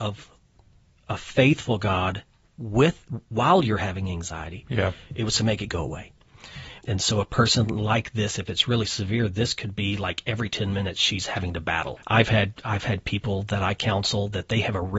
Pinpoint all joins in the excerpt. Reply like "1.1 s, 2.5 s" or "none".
6.8 s, 12.0 s